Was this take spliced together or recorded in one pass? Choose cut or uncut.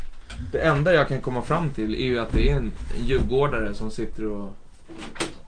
uncut